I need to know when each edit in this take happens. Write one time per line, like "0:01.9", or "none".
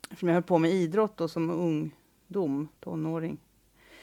0:02.8